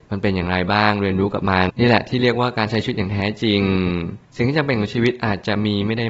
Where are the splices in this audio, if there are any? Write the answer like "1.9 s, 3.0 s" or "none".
1.7 s